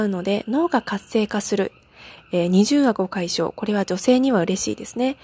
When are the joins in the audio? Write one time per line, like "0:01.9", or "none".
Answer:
0:02.2